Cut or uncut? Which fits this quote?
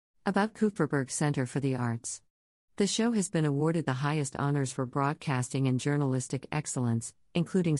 cut